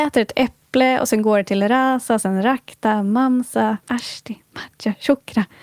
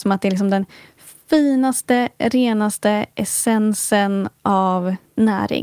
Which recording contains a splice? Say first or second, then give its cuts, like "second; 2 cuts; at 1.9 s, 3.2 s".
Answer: first; 1 cut; at 3.8 s